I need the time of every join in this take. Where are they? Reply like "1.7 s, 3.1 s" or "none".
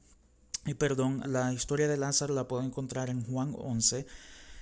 1.2 s